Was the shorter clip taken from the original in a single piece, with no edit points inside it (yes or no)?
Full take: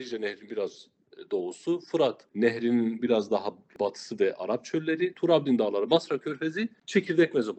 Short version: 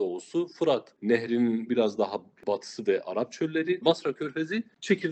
no